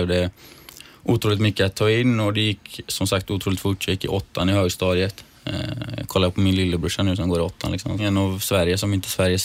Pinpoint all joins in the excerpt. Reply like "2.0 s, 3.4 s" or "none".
8.0 s